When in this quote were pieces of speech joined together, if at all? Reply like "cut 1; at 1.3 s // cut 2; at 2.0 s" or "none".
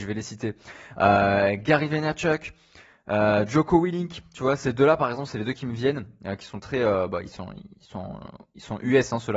none